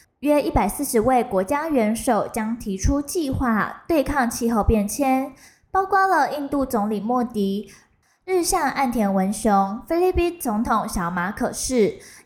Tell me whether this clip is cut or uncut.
uncut